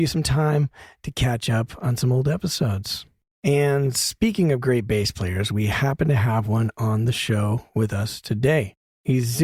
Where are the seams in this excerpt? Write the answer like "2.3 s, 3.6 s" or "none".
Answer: none